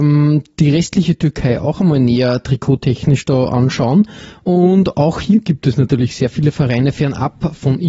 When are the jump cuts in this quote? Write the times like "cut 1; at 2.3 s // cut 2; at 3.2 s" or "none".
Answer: none